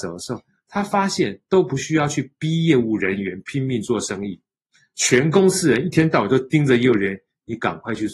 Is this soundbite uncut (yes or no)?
yes